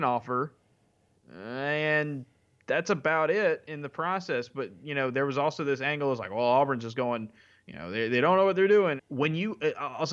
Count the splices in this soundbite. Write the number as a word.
one